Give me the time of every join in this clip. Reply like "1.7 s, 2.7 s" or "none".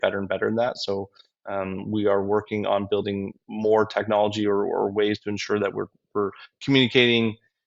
none